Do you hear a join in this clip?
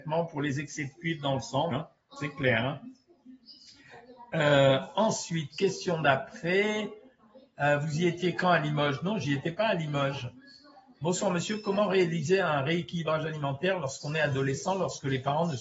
yes; 1 cut; at 1.7 s

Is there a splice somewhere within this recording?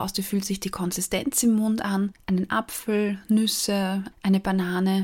yes; 2 cuts; at 2.1 s, 4.1 s

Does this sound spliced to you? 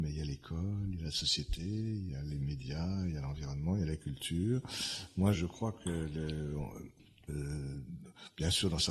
yes; 2 cuts; at 5.3 s, 7.3 s

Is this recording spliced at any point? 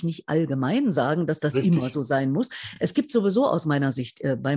no; 0 cuts

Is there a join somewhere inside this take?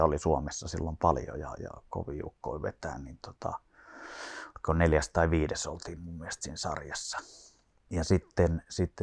yes; 1 cut; at 1.9 s

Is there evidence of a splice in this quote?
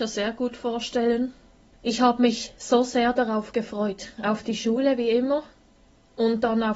yes; 1 cut; at 1.7 s

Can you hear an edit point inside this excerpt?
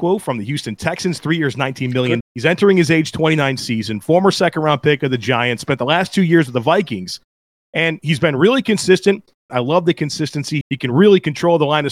yes; 3 cuts; at 2.2 s, 9.5 s, 10.6 s

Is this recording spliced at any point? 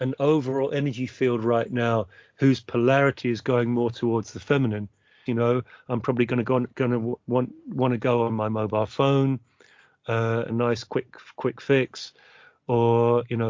yes; 2 cuts; at 5.3 s, 10.5 s

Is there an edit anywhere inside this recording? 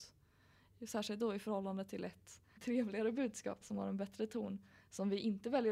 yes; 2 cuts; at 2.6 s, 3.6 s

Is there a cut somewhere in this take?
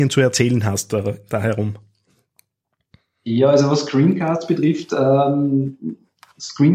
no; 0 cuts

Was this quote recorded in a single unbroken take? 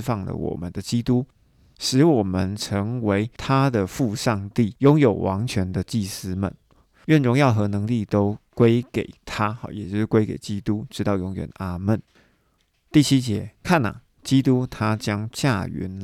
yes; 0 cuts

